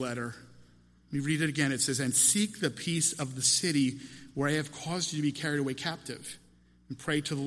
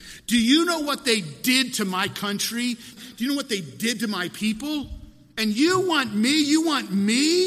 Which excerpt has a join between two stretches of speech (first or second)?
second